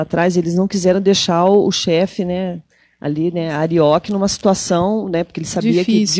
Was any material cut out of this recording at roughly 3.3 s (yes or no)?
no